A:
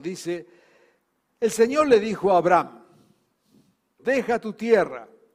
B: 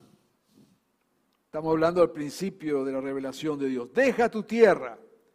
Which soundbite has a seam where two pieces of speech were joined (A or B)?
A